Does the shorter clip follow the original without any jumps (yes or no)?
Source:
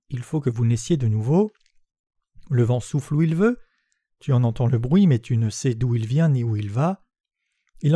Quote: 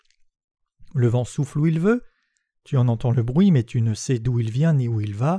yes